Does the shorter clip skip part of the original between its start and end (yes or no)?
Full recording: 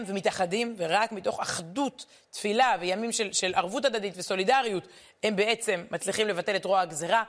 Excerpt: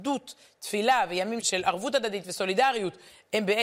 yes